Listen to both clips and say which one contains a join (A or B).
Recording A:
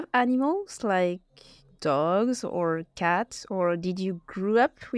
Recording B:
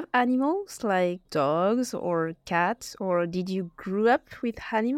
B